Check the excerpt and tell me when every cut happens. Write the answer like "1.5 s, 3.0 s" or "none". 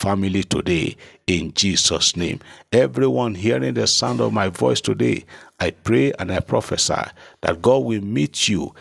none